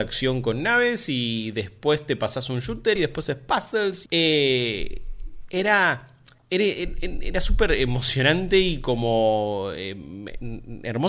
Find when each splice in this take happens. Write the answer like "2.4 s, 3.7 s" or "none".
3.0 s, 4.1 s, 6.4 s